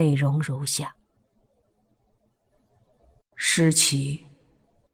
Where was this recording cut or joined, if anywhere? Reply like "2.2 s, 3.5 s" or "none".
none